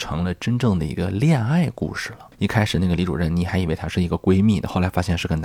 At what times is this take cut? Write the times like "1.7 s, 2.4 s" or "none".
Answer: 2.3 s

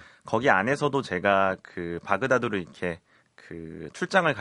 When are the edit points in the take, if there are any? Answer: none

